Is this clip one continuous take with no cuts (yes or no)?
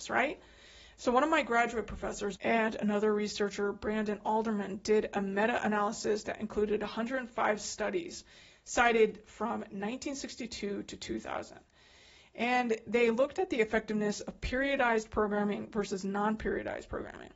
no